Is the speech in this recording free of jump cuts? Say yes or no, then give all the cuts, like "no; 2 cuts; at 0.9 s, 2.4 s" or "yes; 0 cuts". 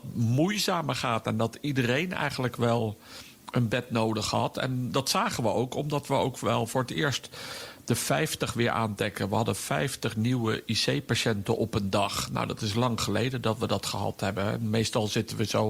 yes; 0 cuts